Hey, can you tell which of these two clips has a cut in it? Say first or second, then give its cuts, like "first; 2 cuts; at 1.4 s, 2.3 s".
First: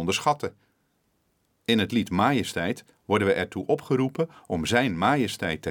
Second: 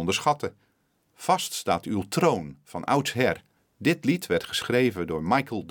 second; 2 cuts; at 1.0 s, 3.6 s